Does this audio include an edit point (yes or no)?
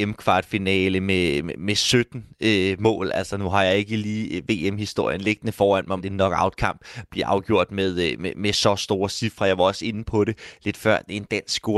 yes